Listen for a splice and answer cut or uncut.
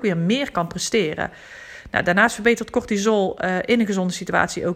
uncut